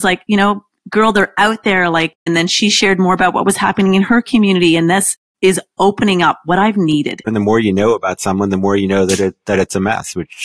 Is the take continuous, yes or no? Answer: no